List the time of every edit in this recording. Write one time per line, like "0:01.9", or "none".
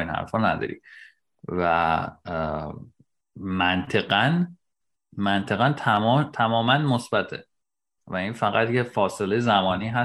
none